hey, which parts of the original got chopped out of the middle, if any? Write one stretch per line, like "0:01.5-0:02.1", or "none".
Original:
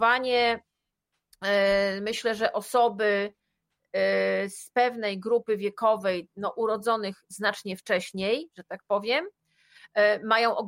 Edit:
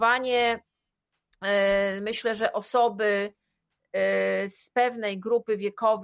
none